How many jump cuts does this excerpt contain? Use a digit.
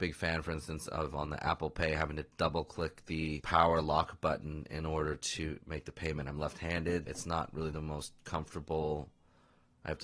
1